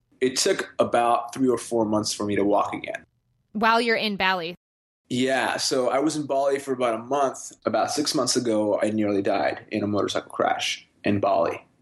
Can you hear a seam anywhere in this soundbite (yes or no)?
yes